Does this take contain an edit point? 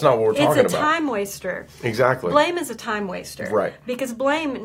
no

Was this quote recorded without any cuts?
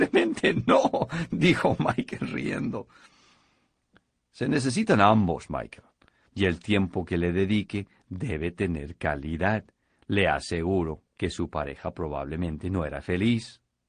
no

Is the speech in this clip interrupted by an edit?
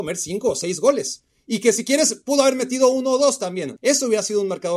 yes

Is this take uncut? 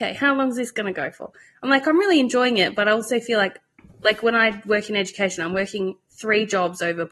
yes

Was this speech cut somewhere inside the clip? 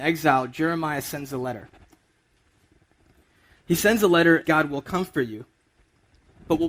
yes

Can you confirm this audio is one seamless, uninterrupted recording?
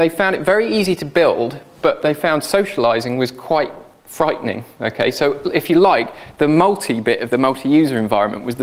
yes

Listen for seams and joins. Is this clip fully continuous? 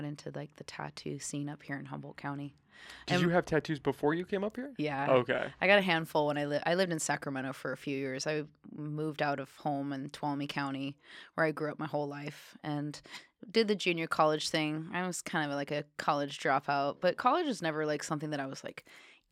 yes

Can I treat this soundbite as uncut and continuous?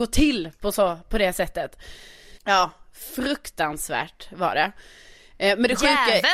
no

